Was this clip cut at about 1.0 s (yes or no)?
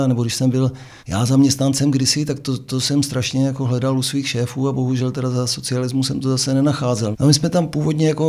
yes